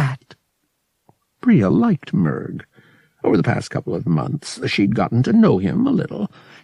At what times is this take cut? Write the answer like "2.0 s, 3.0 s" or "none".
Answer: none